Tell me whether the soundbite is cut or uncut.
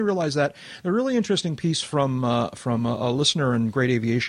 uncut